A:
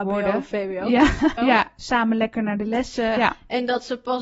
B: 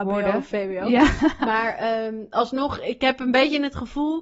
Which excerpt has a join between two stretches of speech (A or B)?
A